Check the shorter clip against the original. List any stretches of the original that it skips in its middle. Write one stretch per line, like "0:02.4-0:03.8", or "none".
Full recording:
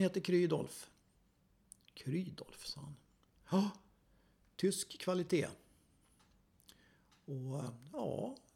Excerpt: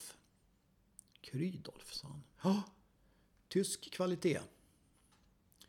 0:03.0-0:03.4